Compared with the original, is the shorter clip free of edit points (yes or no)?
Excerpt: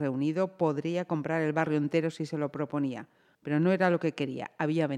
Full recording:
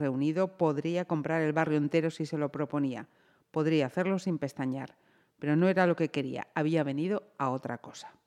no